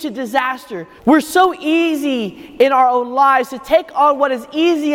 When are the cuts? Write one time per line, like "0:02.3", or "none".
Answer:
0:01.0